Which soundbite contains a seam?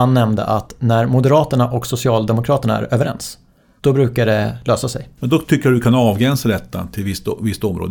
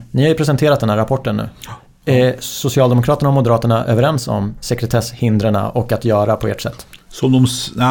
first; 1 cut; at 5.2 s

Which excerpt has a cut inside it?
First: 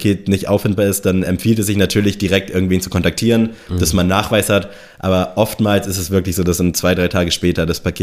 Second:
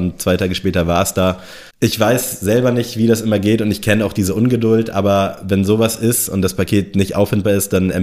second; 1 cut; at 1.7 s

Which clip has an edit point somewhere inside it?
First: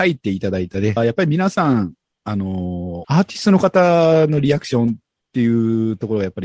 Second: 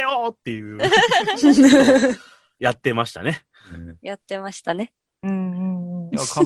first; 2 cuts; at 1.0 s, 3.0 s

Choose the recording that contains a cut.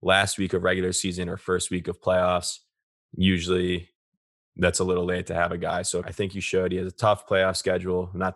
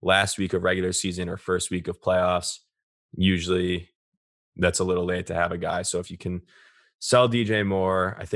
first; 1 cut; at 6.0 s

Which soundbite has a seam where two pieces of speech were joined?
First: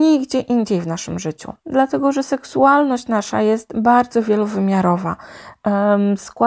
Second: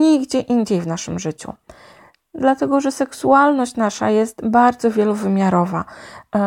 first; 1 cut; at 1.6 s

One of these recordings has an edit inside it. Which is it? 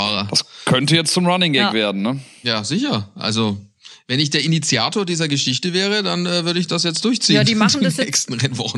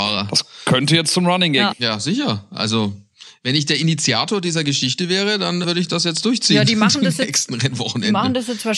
second; 2 cuts; at 1.7 s, 5.6 s

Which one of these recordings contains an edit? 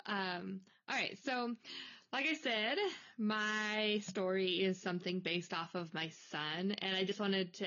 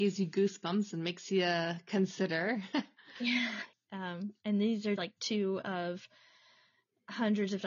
second; 2 cuts; at 3.7 s, 5.0 s

